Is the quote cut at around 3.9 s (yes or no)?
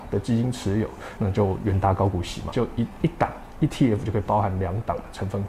no